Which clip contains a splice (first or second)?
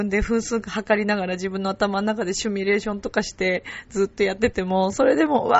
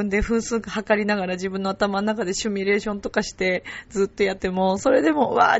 second